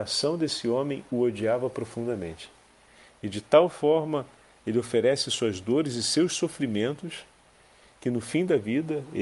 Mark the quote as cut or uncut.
uncut